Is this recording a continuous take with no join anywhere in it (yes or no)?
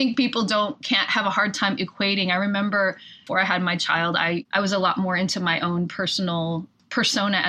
yes